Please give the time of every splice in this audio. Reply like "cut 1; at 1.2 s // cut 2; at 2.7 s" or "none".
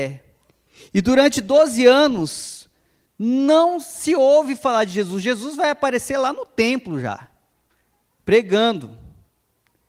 none